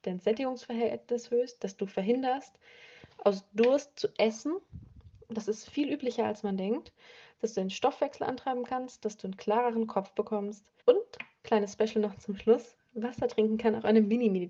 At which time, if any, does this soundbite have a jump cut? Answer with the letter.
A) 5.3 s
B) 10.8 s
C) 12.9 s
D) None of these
B